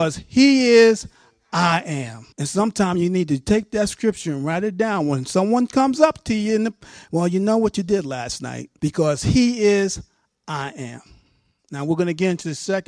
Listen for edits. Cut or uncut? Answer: cut